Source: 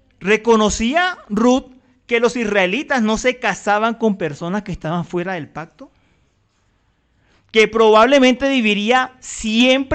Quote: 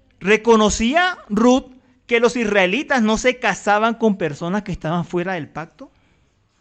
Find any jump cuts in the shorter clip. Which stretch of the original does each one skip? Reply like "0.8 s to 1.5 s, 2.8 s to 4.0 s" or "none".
none